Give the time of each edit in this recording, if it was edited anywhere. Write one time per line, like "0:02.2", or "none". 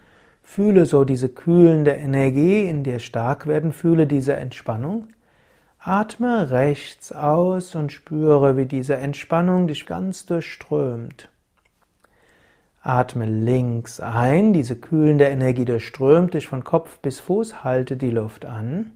0:09.8